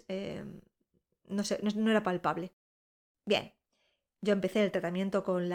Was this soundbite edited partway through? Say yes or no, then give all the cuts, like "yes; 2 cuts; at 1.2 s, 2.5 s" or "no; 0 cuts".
yes; 1 cut; at 3.1 s